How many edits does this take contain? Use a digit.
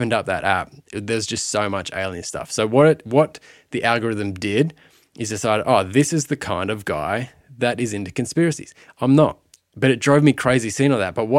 1